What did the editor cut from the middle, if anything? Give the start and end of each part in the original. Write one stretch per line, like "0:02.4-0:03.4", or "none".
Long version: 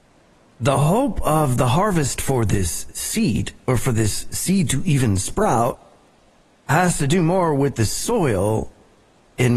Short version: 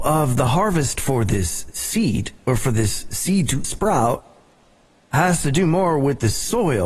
0:04.8-0:05.2